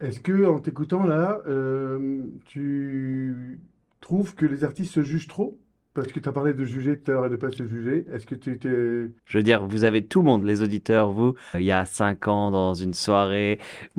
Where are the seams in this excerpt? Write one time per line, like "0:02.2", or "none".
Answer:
0:09.2
0:11.5